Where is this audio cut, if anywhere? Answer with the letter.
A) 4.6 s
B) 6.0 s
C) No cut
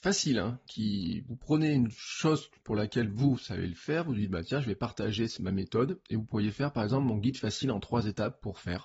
C